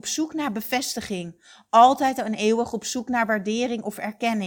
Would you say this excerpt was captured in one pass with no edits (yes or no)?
yes